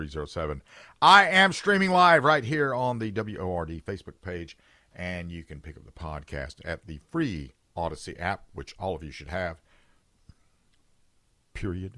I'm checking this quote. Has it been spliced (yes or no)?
no